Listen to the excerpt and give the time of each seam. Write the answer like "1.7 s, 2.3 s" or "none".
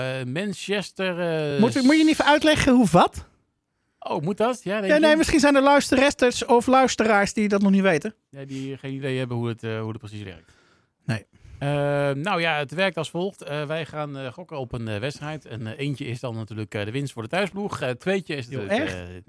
none